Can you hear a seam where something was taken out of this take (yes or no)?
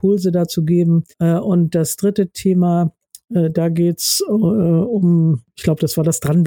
yes